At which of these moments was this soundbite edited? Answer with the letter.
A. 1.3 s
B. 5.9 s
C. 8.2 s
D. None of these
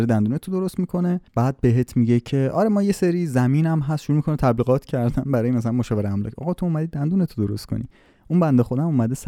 A